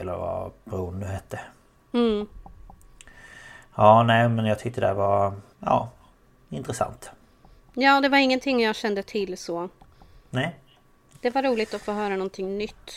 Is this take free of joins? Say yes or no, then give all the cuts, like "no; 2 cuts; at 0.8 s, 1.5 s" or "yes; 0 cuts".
no; 2 cuts; at 5.5 s, 11.1 s